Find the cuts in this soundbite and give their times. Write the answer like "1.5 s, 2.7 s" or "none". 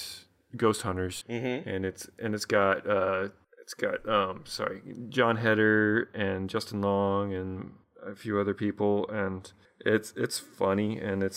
1.2 s